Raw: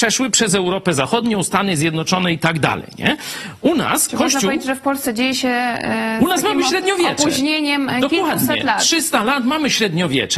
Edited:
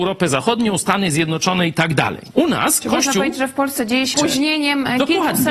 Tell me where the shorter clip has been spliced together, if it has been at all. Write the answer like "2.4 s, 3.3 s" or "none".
2.3 s, 4.1 s